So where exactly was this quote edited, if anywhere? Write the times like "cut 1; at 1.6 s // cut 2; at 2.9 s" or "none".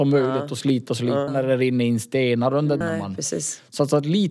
cut 1; at 1.3 s // cut 2; at 2.8 s